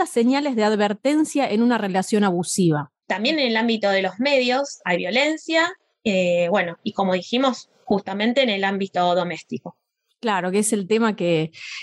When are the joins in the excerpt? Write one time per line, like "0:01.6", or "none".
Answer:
0:03.0